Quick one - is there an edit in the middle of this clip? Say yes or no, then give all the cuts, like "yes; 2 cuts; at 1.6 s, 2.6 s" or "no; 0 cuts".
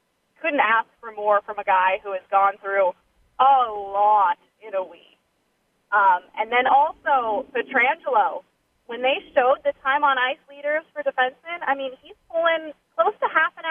no; 0 cuts